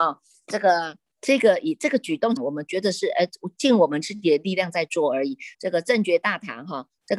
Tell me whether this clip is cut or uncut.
cut